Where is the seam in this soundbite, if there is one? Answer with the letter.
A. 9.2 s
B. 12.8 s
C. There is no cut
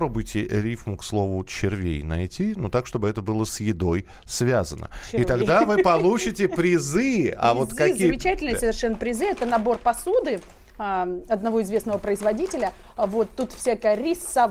C